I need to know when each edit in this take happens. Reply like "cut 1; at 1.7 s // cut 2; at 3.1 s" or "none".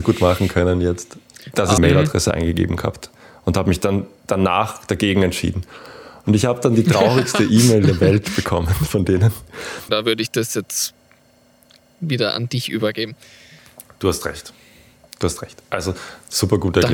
cut 1; at 1.8 s // cut 2; at 9.9 s